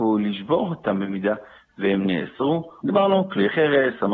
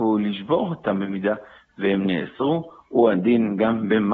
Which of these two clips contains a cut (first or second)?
first